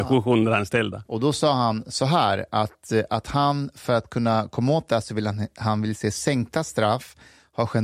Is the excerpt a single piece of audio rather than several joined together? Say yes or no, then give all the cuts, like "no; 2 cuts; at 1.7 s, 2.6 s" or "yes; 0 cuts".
no; 1 cut; at 1.0 s